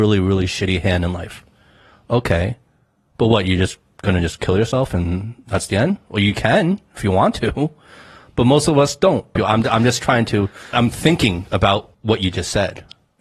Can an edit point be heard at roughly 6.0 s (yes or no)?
no